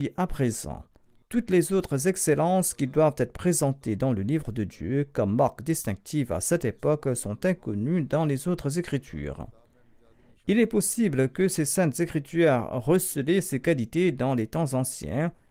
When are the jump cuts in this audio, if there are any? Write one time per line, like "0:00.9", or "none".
0:01.2